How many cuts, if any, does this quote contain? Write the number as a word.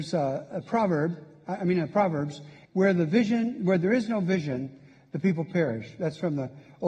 one